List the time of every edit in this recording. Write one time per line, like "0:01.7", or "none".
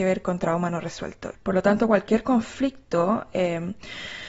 0:01.3